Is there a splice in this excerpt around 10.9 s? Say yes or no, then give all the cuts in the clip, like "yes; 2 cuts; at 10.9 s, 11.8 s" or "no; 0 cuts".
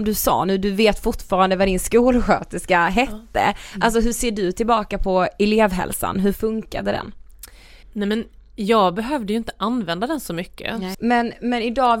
yes; 2 cuts; at 7.8 s, 10.9 s